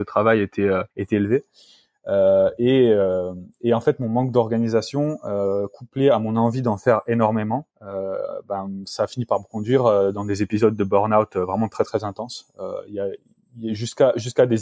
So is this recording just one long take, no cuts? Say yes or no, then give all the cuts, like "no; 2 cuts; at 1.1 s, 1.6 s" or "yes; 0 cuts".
no; 2 cuts; at 0.9 s, 7.7 s